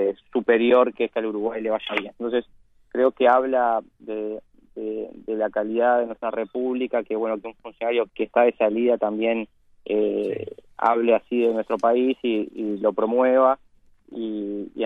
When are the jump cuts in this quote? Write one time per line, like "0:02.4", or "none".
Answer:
0:02.2
0:08.1